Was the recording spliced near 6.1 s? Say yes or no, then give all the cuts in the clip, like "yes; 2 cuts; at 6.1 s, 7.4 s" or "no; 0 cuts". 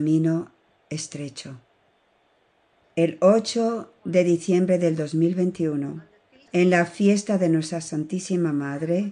no; 0 cuts